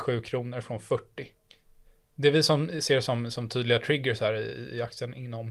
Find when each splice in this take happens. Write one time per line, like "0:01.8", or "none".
none